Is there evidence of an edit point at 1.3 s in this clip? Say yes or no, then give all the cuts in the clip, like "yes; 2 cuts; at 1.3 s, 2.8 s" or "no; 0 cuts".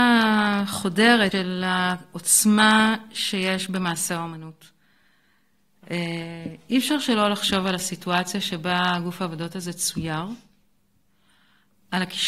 yes; 1 cut; at 1.3 s